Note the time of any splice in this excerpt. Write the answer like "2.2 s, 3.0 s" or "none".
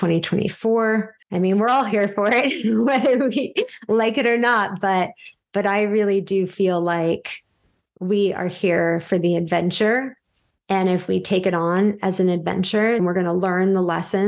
1.2 s, 13.0 s